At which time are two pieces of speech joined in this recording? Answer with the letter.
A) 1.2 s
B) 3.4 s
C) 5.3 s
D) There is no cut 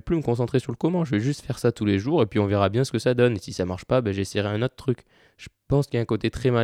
C